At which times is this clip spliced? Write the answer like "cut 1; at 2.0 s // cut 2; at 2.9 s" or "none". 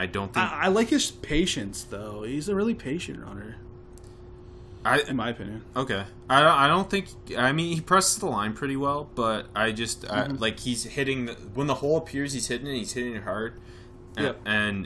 cut 1; at 10.4 s